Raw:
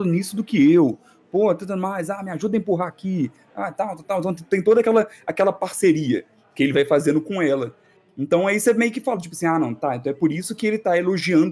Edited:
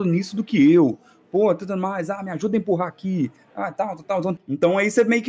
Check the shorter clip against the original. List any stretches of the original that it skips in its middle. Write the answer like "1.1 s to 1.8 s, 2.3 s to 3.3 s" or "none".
4.4 s to 8.1 s